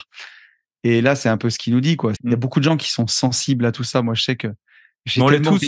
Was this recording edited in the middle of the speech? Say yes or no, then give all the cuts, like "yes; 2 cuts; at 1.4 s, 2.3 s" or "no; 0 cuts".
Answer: yes; 1 cut; at 2.2 s